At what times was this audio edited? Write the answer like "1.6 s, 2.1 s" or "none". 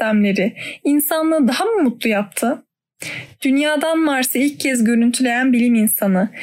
none